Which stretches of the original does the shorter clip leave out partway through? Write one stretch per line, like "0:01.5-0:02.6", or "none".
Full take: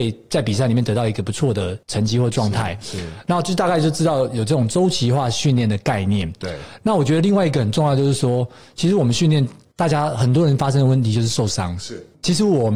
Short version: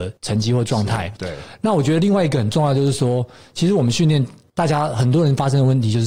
0:02.8-0:06.4